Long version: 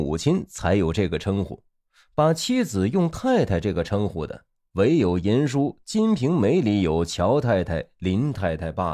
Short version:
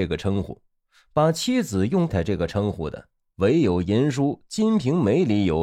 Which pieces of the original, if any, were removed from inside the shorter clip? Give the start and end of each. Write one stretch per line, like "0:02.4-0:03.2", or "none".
0:03.1-0:03.5